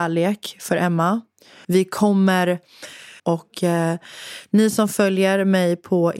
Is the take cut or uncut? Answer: cut